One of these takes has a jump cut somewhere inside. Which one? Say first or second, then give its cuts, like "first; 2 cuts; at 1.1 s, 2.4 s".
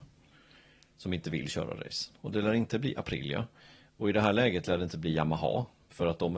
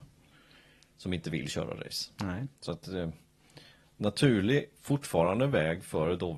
first; 1 cut; at 2.1 s